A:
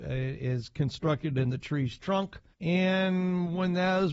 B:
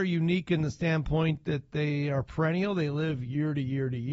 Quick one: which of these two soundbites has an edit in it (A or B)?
A